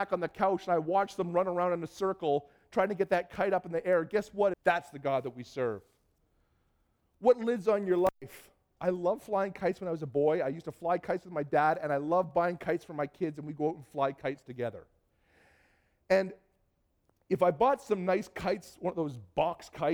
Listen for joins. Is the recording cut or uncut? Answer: cut